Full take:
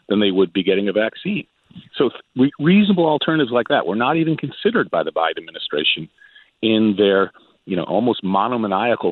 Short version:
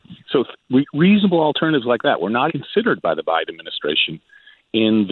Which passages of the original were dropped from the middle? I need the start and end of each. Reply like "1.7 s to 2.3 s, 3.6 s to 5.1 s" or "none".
4.1 s to 4.4 s

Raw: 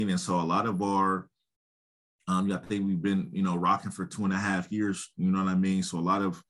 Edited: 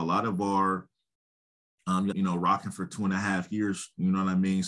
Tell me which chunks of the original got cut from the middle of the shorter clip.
2.5 s to 3.3 s

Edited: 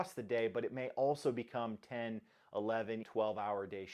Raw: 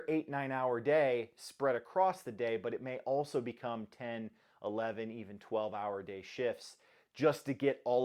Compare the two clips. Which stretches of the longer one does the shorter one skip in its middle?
5.1 s to 5.4 s

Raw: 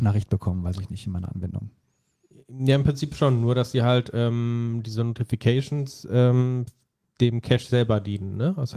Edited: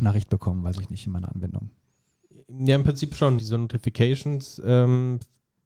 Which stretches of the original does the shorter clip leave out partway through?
3.4 s to 4.8 s

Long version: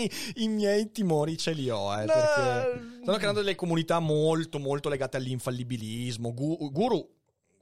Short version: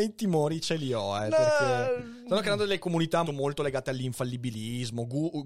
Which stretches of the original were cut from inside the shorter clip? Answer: 4.0 s to 4.5 s

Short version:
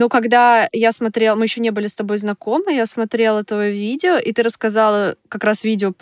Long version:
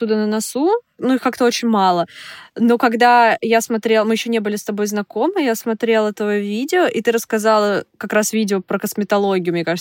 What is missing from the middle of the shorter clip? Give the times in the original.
none

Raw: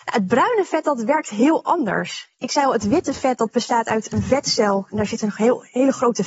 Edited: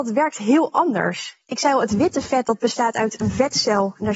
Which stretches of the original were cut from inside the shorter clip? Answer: none

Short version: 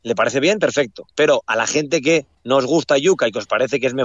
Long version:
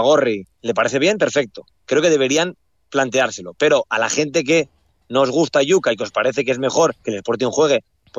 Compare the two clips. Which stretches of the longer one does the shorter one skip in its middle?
1.7 s to 3.6 s, 4.8 s to 5.0 s

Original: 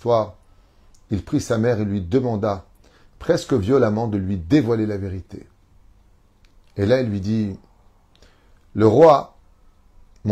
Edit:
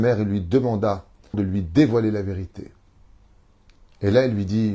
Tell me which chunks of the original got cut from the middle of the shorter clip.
2.9 s to 4.1 s

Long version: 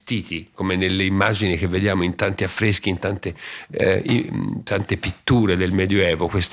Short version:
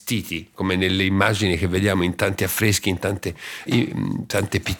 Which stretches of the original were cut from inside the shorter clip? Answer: 3.7 s to 4.0 s

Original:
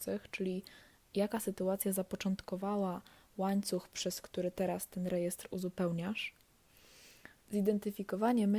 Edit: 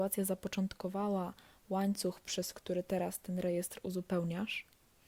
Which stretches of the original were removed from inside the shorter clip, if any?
none

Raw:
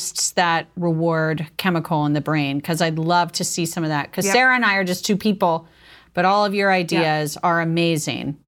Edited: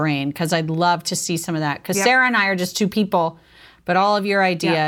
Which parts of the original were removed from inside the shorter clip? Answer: none

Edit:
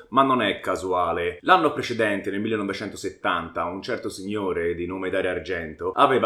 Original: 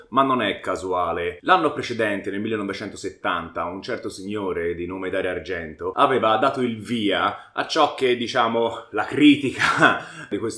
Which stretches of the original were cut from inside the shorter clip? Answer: none

